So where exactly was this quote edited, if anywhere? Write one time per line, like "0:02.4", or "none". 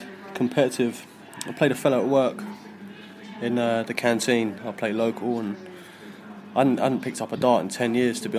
0:04.6